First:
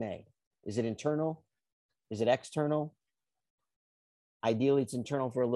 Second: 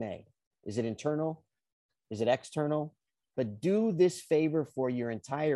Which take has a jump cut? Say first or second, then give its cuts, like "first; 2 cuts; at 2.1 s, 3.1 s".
second; 1 cut; at 3.2 s